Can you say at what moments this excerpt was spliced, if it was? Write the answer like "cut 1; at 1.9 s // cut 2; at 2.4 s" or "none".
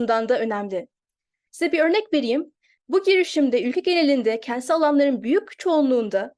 cut 1; at 1.5 s // cut 2; at 2.8 s